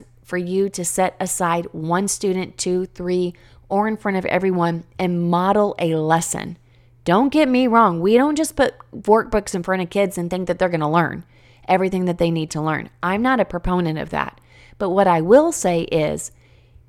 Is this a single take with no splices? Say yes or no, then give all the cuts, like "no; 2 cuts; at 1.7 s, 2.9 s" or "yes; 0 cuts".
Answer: yes; 0 cuts